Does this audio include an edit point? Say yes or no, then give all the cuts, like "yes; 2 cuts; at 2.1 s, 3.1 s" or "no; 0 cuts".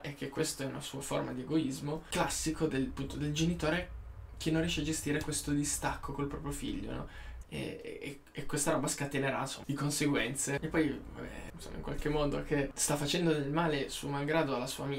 yes; 3 cuts; at 7.4 s, 9.6 s, 11.5 s